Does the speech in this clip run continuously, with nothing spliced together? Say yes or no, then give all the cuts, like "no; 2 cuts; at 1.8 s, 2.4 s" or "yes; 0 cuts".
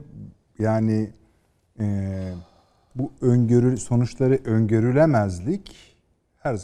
yes; 0 cuts